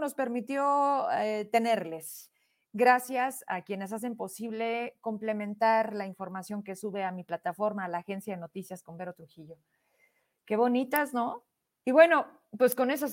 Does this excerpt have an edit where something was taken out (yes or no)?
yes